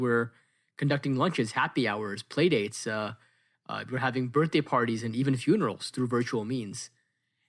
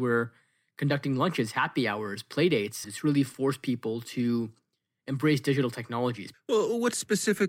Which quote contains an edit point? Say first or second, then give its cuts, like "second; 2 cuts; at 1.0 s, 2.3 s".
second; 2 cuts; at 2.8 s, 6.3 s